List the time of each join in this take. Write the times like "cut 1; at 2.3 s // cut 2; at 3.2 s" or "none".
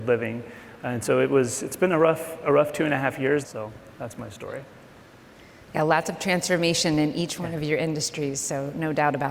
cut 1; at 3.4 s